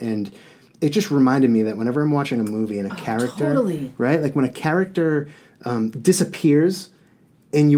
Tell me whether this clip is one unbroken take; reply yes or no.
yes